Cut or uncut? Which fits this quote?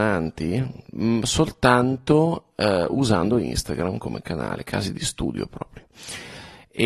uncut